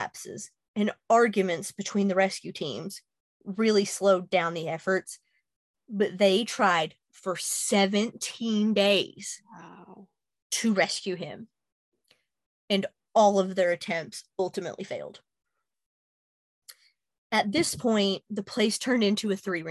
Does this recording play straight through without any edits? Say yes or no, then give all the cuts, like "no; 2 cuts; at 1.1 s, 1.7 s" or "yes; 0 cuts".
yes; 0 cuts